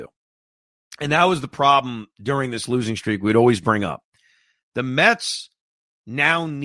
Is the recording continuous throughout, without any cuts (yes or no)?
yes